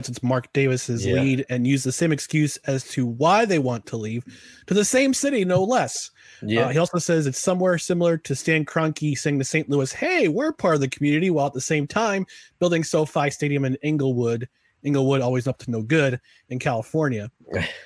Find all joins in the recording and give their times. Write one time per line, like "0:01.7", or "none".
none